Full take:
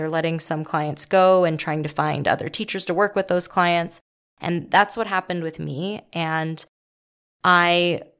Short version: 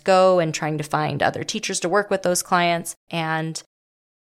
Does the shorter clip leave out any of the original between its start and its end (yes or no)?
yes